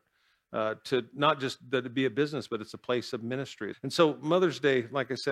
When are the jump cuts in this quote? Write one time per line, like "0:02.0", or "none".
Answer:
0:03.7